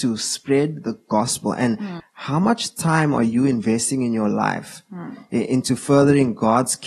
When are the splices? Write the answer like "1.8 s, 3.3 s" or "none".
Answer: 2.0 s